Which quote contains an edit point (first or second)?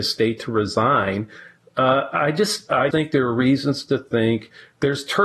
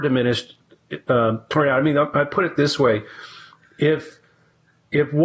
first